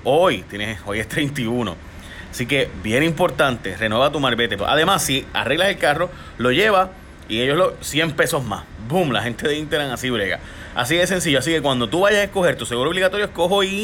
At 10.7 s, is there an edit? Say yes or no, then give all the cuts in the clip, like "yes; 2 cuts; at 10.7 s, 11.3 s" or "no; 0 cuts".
no; 1 cut; at 4.6 s